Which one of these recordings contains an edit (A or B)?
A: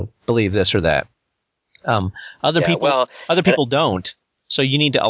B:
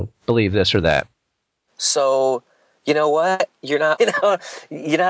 B